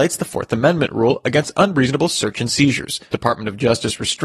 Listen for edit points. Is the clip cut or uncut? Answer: cut